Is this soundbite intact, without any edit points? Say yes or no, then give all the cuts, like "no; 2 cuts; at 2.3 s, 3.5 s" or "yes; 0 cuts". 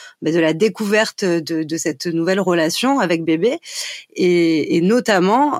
yes; 0 cuts